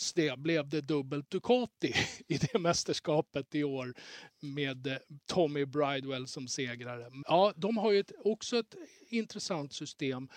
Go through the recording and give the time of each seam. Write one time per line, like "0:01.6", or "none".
0:07.2